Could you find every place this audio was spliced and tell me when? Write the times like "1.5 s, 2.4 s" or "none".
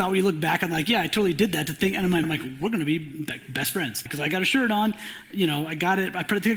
2.2 s, 4.1 s

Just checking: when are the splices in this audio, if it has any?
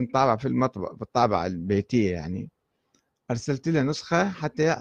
none

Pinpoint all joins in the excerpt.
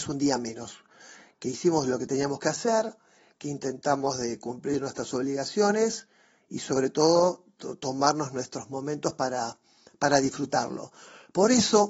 none

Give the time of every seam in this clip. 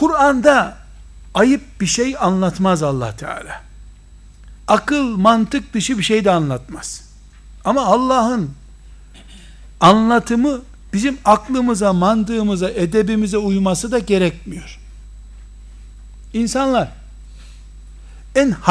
4.6 s

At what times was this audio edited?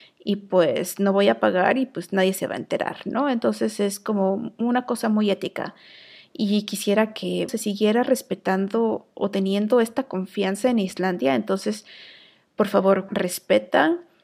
7.5 s, 13.1 s

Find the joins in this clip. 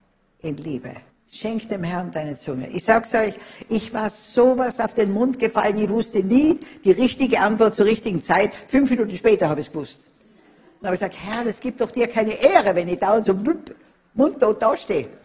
1.1 s

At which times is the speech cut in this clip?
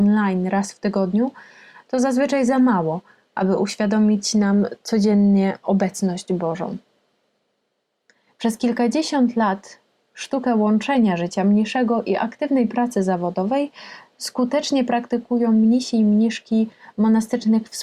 none

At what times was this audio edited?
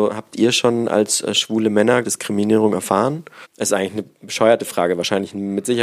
2.0 s

